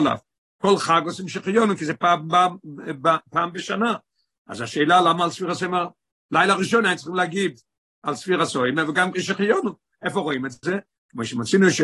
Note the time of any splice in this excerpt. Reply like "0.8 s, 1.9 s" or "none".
9.9 s